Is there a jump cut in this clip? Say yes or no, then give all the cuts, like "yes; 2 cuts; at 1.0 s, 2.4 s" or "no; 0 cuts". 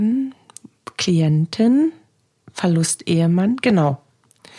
no; 0 cuts